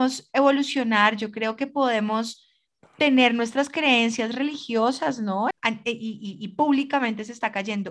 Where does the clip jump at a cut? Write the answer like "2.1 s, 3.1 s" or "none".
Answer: 5.5 s